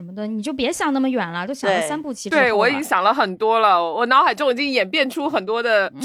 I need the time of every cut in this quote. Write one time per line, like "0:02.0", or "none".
none